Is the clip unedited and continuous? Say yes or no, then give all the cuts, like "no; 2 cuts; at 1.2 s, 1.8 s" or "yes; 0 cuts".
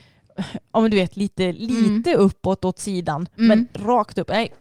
yes; 0 cuts